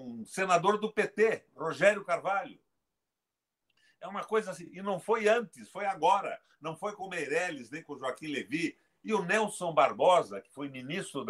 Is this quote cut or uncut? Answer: uncut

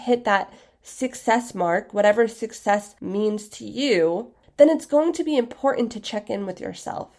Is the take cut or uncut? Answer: uncut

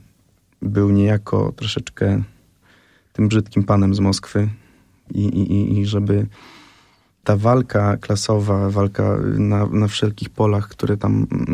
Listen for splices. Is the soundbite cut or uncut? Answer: uncut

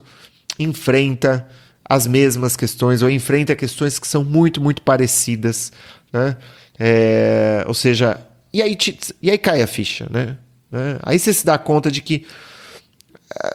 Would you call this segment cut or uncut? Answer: uncut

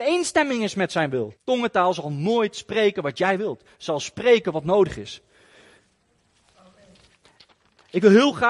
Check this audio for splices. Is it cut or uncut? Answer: cut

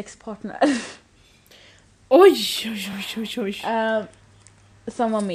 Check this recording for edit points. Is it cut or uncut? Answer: uncut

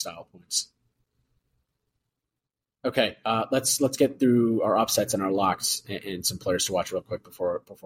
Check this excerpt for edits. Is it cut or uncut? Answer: uncut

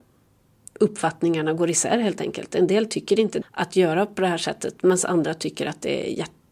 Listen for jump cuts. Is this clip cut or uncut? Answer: cut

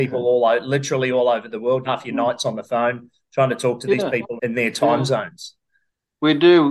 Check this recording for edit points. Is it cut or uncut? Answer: cut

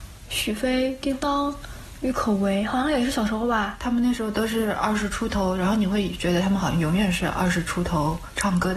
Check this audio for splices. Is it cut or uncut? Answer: uncut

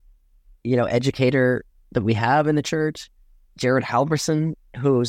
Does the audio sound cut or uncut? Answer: uncut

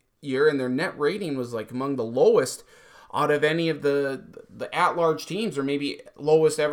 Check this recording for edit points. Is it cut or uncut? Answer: uncut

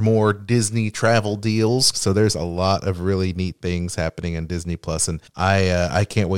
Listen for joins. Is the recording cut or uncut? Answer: cut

